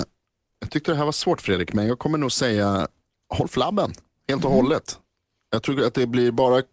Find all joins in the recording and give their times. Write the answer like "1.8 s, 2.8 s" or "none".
none